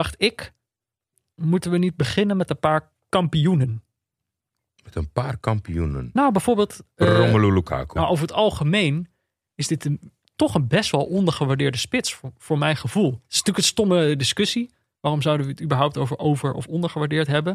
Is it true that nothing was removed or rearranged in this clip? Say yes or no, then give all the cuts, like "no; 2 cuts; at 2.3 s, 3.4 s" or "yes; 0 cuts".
no; 1 cut; at 8.0 s